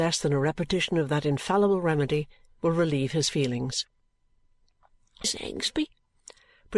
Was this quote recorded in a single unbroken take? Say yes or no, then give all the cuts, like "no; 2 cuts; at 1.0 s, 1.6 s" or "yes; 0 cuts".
no; 1 cut; at 5.2 s